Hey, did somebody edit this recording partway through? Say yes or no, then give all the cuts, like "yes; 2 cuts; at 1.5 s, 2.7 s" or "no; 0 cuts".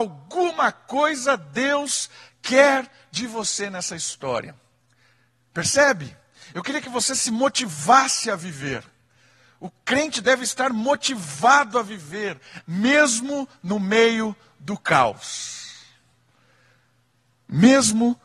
yes; 1 cut; at 12.6 s